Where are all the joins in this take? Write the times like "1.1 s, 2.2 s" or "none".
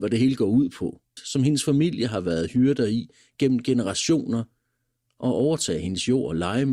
1.2 s